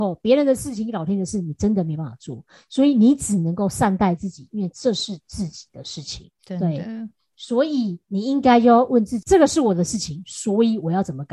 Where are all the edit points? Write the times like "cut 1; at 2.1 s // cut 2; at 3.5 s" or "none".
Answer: none